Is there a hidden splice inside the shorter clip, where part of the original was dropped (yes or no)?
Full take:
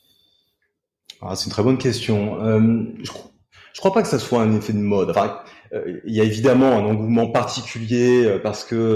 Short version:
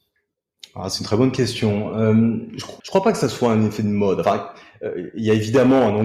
yes